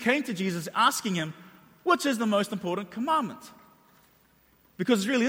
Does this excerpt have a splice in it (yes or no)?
no